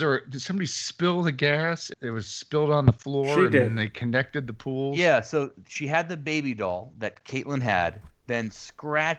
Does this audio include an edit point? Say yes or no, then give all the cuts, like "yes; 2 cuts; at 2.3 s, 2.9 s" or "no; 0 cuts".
yes; 2 cuts; at 1.9 s, 8.1 s